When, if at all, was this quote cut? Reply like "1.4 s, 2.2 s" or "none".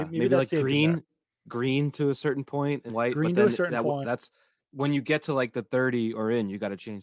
2.9 s, 4.0 s

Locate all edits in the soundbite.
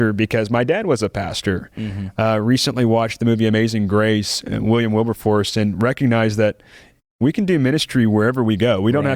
none

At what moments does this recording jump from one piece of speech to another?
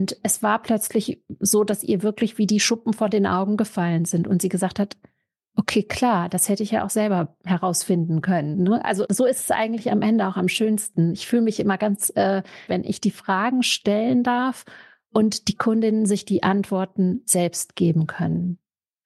9.1 s, 12.7 s

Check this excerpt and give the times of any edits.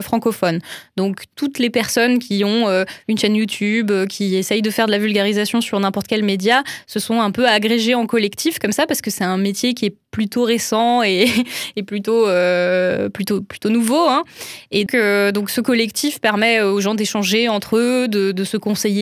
14.9 s

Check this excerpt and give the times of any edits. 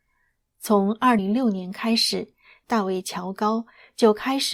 1.2 s, 2.6 s

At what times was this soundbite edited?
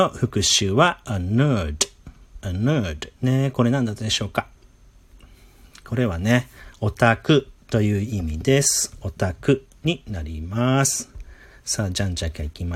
3.2 s

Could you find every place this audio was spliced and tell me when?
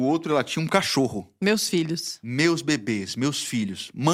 none

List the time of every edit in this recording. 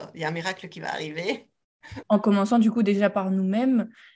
2.0 s

